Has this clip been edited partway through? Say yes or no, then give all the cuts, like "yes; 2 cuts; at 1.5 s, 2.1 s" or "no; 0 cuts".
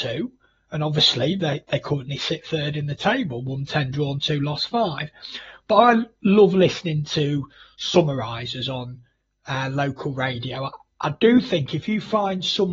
no; 0 cuts